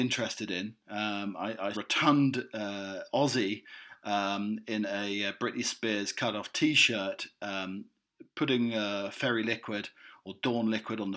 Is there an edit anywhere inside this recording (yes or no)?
yes